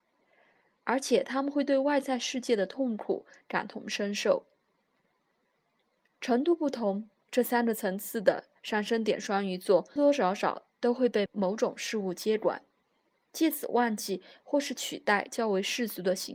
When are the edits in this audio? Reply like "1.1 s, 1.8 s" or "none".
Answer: 10.0 s, 11.3 s